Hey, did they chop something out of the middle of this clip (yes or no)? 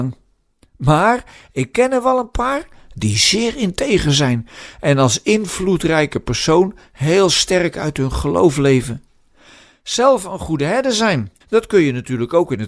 yes